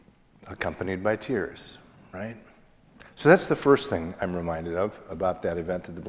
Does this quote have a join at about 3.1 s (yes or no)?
no